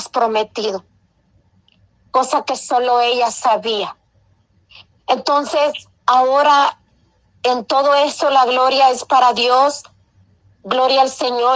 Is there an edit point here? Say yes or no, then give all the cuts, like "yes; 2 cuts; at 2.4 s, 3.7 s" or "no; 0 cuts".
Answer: no; 0 cuts